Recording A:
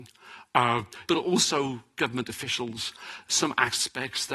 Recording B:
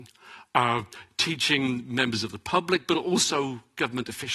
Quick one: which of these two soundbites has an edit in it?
A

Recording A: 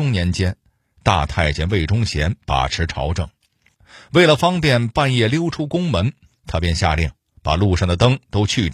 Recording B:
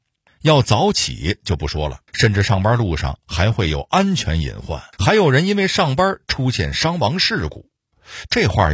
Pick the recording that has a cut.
B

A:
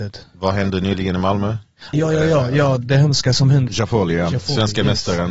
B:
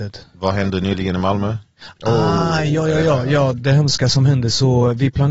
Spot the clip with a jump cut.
A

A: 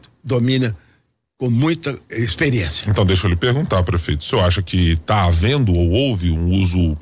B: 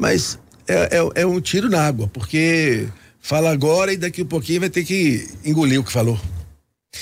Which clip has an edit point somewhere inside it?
A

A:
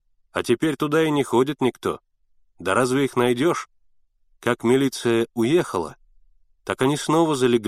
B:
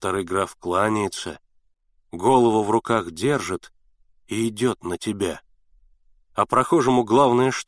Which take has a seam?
A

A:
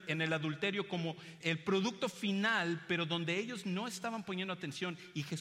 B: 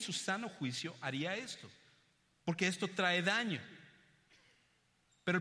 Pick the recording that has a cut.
A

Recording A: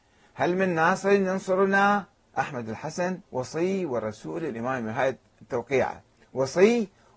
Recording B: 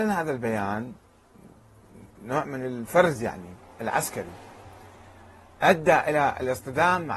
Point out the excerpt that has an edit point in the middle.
A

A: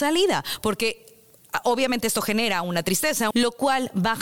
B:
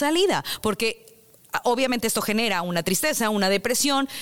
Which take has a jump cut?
A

